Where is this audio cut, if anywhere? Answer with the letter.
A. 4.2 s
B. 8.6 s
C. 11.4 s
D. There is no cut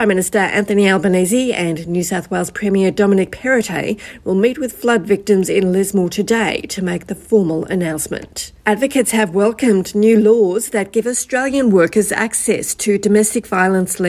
B